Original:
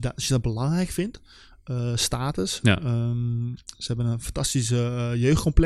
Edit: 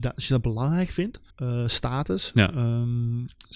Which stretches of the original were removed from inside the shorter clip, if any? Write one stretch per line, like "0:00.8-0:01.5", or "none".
0:01.3-0:01.6